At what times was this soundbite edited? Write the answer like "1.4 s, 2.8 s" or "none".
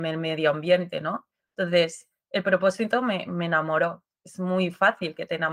none